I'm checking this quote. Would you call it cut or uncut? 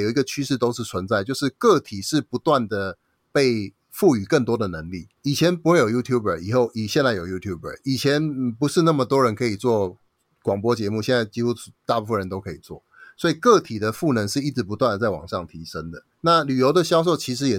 cut